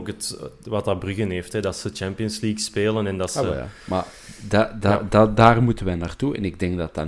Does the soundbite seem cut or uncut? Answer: uncut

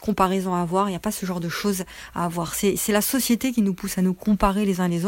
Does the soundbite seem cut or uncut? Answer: uncut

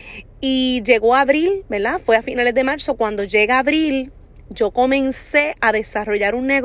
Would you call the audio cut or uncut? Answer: uncut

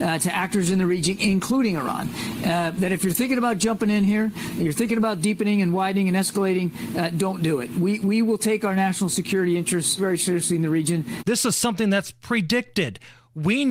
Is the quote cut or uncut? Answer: cut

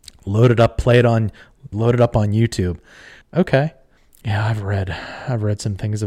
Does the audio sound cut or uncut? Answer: cut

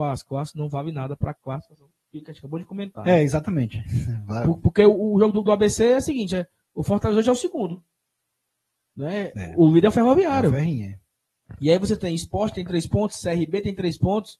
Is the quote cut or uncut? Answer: uncut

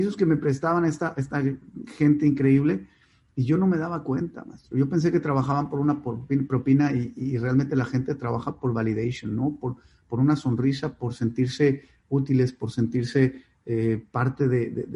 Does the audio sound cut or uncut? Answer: uncut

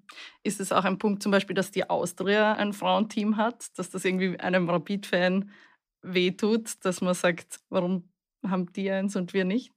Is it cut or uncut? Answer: cut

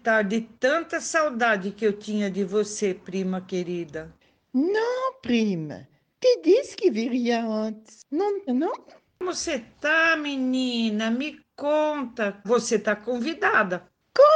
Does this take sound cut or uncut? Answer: cut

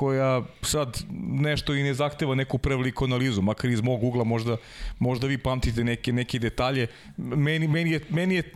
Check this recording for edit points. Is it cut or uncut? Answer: uncut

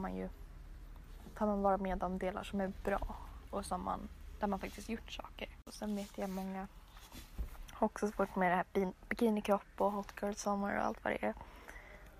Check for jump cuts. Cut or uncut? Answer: uncut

